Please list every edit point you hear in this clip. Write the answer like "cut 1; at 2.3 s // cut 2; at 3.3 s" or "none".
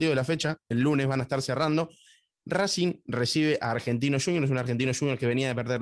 none

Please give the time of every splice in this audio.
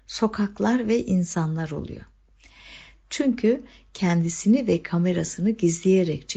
cut 1; at 3.0 s

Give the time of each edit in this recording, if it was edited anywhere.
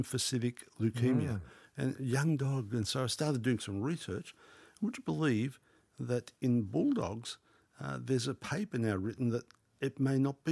none

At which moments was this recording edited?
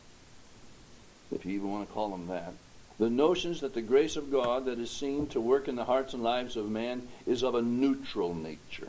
cut 1; at 2.9 s

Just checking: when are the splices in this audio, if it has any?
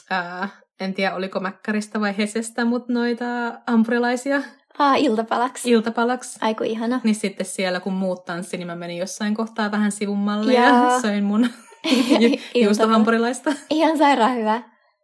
none

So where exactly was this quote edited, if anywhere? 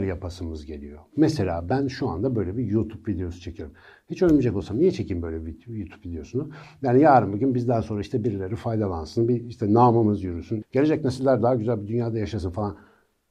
cut 1; at 10.6 s

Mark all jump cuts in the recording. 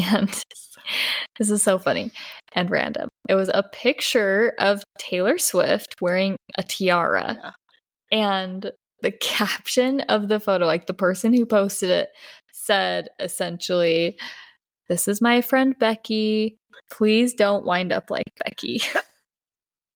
cut 1; at 16.8 s

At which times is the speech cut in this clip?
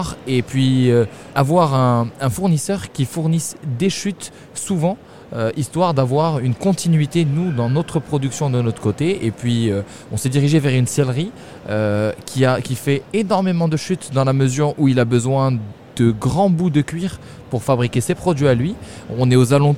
cut 1; at 1.3 s

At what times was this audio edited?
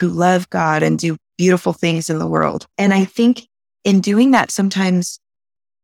cut 1; at 2.7 s

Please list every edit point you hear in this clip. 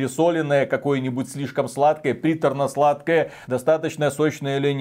none

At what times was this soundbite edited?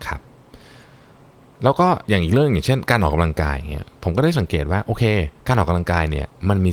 cut 1; at 2.0 s // cut 2; at 5.4 s

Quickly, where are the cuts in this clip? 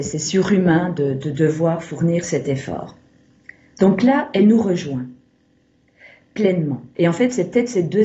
cut 1; at 7.0 s

